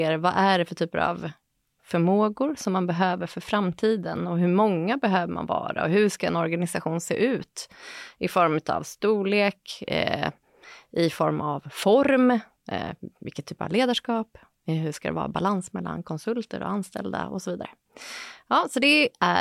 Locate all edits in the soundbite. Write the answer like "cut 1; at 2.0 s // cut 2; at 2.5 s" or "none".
none